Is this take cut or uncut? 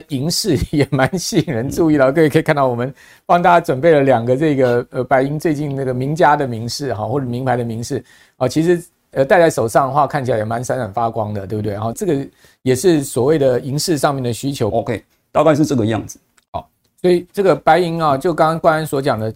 cut